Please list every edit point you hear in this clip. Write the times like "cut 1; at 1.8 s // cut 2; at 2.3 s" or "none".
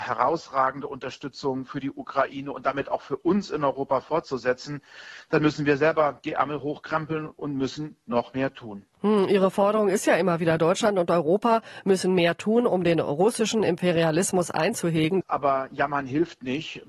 cut 1; at 15.2 s

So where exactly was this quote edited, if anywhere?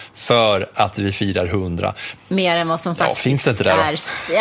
cut 1; at 2.2 s

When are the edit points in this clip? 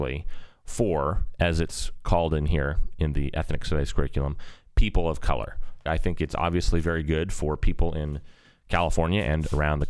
cut 1; at 5.9 s

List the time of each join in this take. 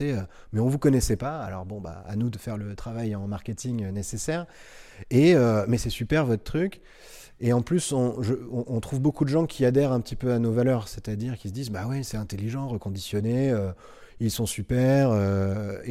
none

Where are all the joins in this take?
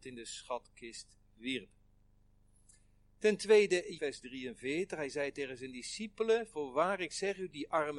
cut 1; at 4.0 s

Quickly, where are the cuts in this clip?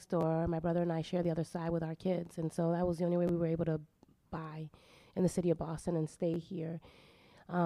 none

